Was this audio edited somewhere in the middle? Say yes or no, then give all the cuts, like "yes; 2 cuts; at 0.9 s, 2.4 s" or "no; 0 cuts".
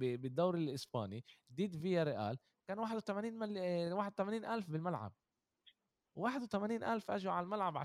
no; 0 cuts